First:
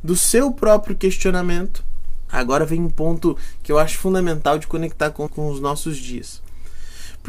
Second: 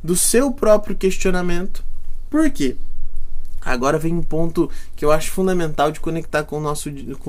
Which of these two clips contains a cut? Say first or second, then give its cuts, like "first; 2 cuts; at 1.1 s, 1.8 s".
first; 2 cuts; at 2.3 s, 5.3 s